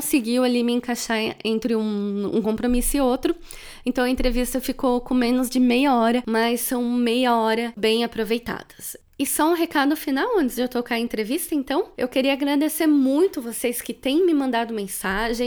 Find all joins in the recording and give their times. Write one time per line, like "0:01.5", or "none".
0:07.8